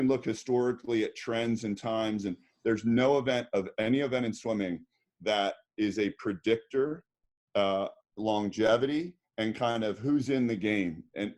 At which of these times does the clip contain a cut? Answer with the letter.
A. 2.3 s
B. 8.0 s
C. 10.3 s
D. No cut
B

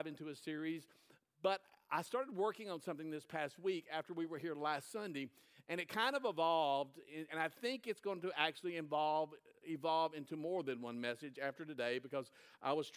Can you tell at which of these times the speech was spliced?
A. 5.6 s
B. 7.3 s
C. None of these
B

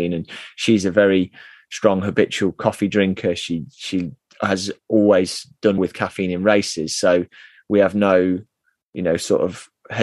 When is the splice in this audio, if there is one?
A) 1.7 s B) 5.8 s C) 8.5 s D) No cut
B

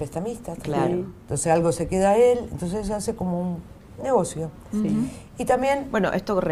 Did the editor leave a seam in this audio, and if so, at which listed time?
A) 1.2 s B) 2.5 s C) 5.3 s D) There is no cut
A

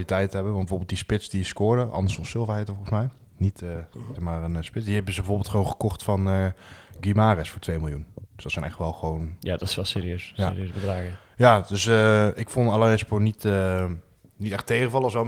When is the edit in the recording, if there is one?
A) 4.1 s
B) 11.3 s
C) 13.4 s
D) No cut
A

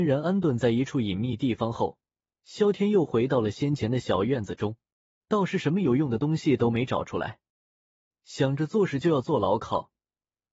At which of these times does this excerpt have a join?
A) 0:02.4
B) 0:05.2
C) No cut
B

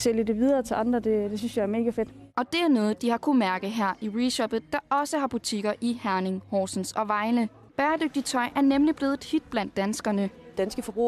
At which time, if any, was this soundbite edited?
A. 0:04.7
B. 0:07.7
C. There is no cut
B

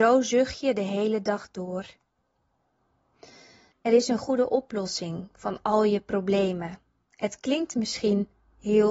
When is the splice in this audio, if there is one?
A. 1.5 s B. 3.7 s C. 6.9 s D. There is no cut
B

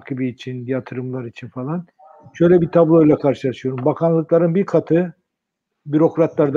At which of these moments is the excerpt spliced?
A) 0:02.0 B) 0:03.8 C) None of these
C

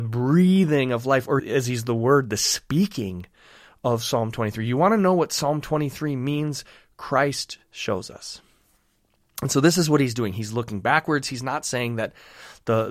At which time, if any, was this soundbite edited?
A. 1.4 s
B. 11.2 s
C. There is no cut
A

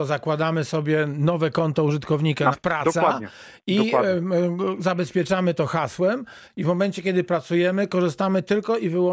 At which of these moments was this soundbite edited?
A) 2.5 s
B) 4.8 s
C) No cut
A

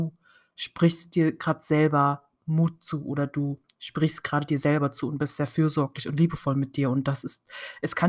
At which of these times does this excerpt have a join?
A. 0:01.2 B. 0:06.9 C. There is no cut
C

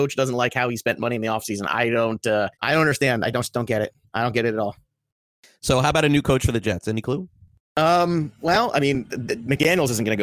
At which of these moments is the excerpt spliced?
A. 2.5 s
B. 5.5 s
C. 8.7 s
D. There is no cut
A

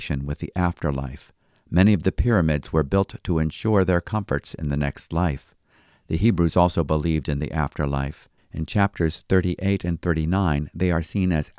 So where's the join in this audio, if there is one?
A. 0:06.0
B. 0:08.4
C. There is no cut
B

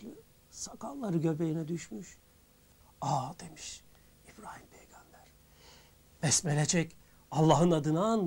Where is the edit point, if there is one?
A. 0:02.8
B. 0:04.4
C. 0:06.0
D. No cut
A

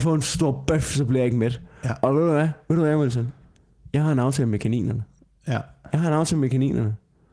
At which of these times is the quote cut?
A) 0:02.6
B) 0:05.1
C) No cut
C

